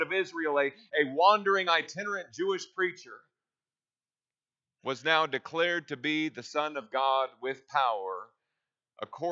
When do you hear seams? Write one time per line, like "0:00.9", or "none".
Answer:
none